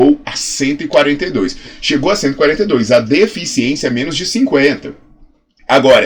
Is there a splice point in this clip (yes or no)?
no